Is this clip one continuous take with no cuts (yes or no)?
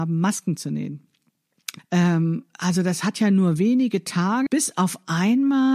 no